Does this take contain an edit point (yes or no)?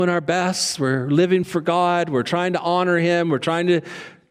no